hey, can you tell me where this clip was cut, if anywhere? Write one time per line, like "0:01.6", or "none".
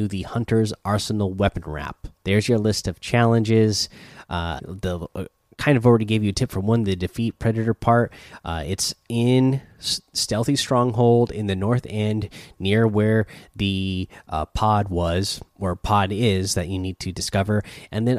0:02.2
0:04.6